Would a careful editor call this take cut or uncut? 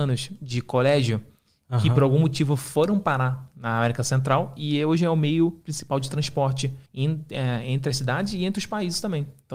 cut